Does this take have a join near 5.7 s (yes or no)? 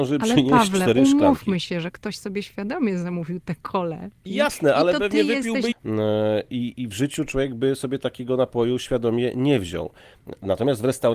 yes